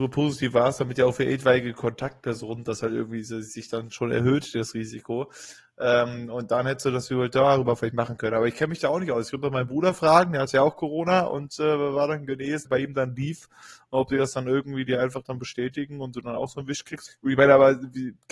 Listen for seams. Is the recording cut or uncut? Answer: cut